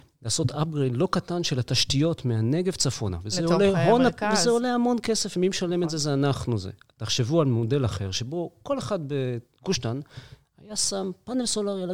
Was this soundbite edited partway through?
no; 0 cuts

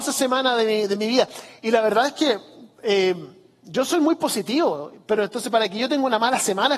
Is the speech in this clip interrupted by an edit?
no; 0 cuts

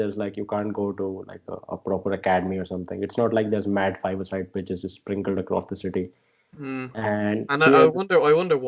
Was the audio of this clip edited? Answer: no; 0 cuts

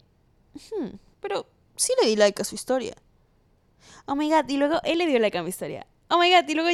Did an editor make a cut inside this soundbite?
yes; 1 cut; at 1.1 s

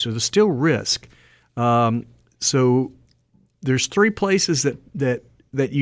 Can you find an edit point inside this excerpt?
no; 0 cuts

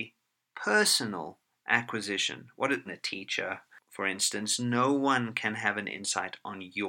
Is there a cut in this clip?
yes; 1 cut; at 2.9 s

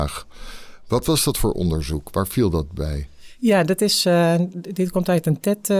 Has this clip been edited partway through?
no; 0 cuts

